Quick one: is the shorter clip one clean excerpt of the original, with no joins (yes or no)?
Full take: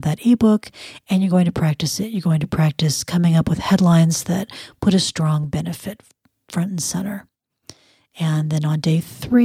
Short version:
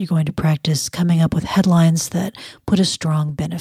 yes